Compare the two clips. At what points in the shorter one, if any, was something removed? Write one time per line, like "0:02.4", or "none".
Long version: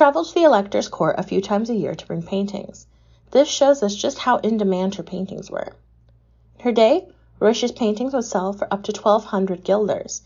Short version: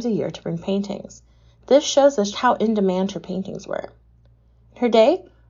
0:02.3